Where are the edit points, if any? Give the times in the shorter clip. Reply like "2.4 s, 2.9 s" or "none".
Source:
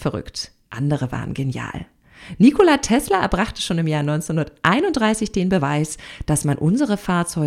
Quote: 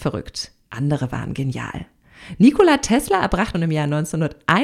3.5 s